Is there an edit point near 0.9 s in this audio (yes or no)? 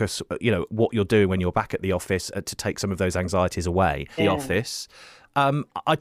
no